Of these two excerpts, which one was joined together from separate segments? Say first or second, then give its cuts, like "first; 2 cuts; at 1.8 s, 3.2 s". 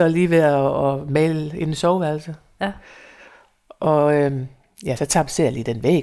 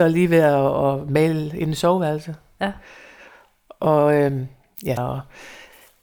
second; 1 cut; at 5.0 s